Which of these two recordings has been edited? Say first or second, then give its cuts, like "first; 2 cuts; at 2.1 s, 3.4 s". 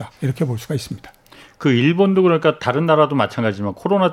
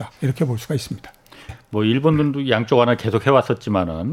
second; 1 cut; at 1.5 s